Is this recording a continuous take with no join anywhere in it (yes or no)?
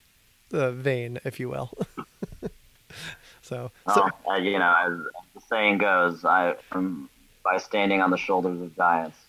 no